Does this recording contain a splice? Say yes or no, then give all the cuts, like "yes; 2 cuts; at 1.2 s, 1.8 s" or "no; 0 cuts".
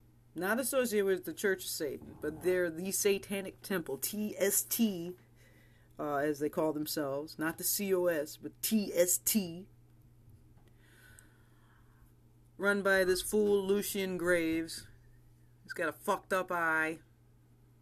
no; 0 cuts